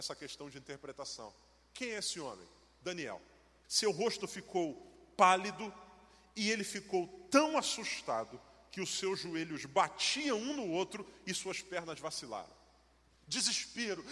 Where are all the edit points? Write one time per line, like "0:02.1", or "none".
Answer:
0:03.6